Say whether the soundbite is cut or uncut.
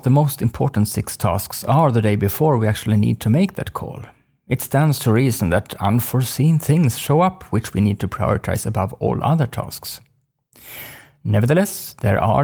uncut